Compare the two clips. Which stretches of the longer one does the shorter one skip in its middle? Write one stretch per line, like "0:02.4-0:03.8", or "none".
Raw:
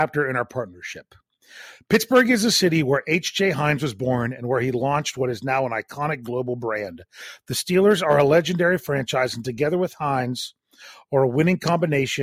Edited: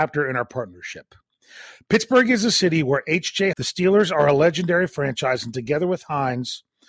0:03.5-0:07.4

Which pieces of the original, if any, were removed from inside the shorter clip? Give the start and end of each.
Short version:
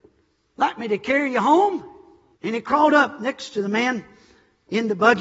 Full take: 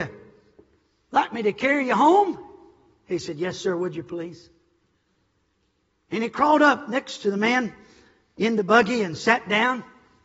0:02.9-0:06.0

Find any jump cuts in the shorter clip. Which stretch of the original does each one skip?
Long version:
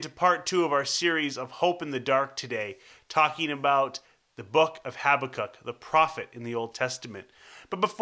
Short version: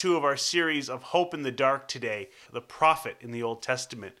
0:02.9-0:05.6

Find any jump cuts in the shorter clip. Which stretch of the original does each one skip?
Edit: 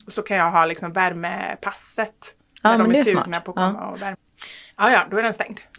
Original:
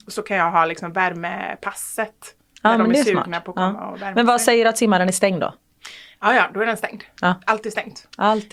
0:04.1-0:05.6

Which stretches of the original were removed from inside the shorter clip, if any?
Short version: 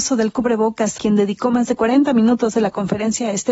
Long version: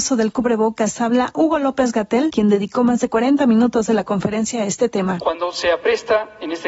0:01.0-0:02.3

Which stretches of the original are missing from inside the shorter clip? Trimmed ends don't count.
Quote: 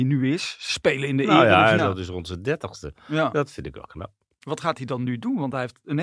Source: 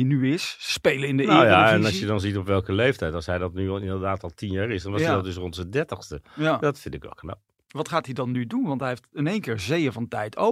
0:01.8-0:05.1

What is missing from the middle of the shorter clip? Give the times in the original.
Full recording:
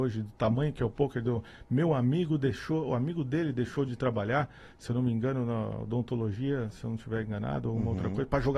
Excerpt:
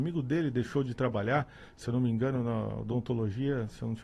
none

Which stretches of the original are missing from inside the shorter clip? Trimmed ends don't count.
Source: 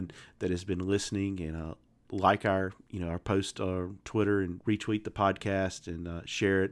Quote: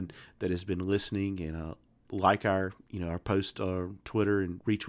none

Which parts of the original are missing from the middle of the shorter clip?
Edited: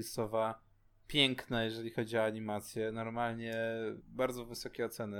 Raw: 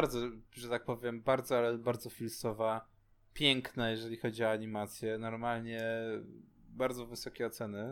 0:06.3-0:06.6

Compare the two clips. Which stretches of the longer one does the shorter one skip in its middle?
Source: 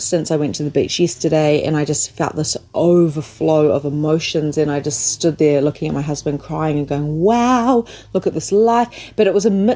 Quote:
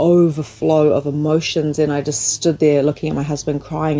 none

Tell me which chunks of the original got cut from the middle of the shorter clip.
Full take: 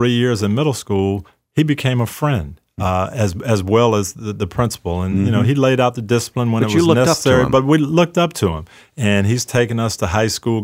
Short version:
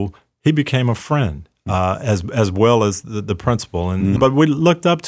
0:05.3-0:07.5

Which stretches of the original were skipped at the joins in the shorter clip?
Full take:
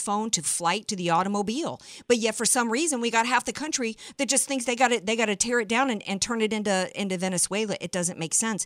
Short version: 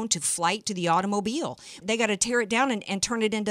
0:02.0-0:05.0

